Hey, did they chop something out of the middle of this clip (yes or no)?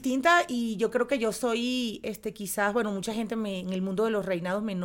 no